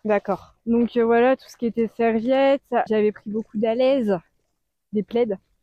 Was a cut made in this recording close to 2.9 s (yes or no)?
yes